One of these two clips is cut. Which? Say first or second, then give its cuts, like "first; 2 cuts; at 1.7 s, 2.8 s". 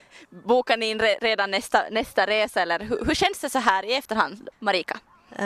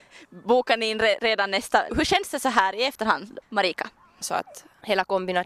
second; 2 cuts; at 1.9 s, 4.2 s